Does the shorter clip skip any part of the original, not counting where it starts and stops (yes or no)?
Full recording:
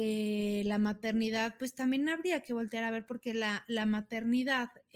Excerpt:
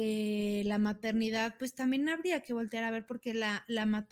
no